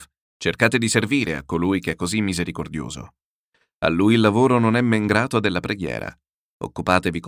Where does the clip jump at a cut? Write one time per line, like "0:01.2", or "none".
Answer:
none